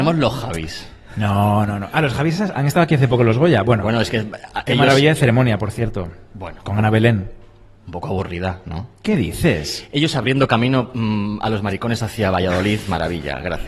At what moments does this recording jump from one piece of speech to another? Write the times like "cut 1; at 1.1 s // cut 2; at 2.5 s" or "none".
none